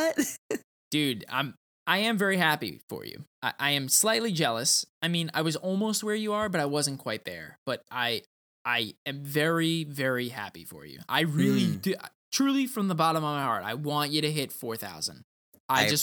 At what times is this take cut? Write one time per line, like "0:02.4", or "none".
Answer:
none